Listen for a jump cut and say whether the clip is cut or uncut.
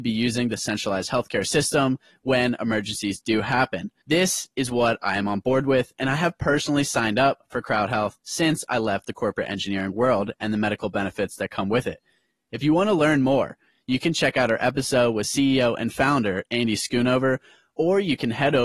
uncut